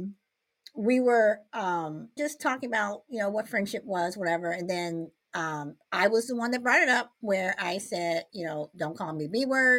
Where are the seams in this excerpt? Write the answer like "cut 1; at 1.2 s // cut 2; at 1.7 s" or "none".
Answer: cut 1; at 2.2 s